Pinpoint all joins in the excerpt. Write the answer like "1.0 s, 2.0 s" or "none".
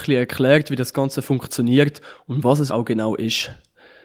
2.7 s